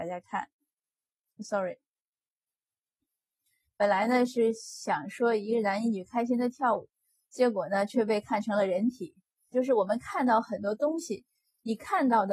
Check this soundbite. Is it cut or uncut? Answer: cut